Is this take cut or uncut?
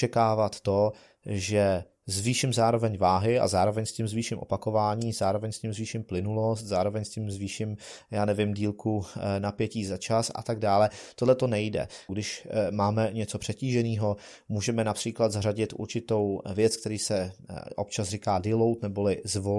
cut